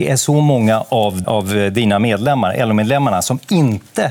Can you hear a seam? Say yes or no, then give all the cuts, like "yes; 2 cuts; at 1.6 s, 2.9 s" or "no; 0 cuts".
yes; 1 cut; at 1.2 s